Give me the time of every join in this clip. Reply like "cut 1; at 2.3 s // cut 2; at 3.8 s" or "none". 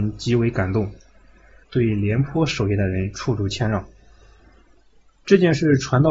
cut 1; at 1.6 s